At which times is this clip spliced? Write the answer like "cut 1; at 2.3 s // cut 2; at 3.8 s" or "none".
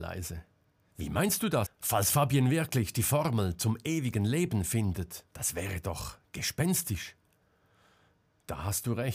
cut 1; at 1.7 s // cut 2; at 5.3 s